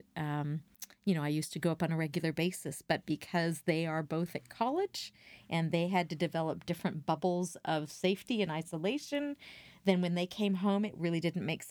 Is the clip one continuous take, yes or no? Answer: yes